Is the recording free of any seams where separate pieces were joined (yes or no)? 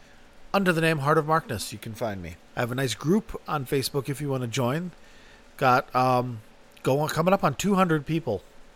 no